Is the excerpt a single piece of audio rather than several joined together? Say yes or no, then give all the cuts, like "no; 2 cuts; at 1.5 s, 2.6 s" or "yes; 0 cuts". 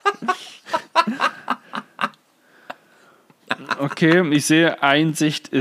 yes; 0 cuts